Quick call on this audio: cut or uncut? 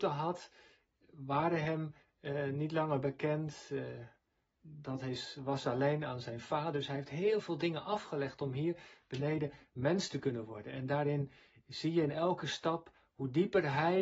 uncut